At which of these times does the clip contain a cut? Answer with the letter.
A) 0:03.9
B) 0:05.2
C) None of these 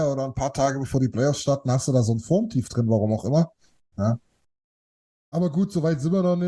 A